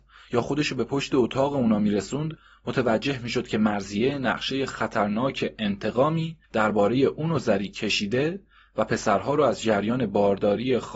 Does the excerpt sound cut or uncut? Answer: cut